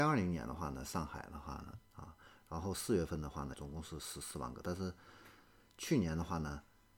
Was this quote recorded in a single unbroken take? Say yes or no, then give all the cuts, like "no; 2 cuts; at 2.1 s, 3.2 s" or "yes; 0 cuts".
no; 2 cuts; at 1.8 s, 3.5 s